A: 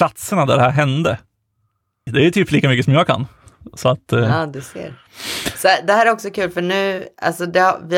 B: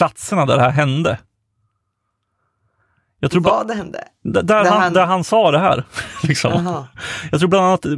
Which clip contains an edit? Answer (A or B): A